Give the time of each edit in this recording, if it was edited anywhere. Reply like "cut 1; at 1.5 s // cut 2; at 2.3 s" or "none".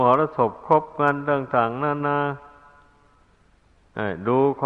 cut 1; at 2.0 s